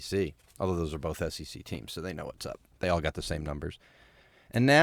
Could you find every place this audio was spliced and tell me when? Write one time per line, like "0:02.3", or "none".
none